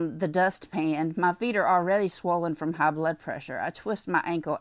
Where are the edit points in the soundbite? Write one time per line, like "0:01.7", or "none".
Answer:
none